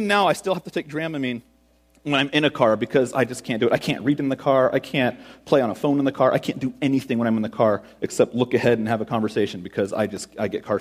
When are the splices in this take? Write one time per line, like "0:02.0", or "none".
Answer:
none